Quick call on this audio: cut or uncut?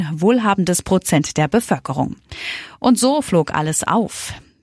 uncut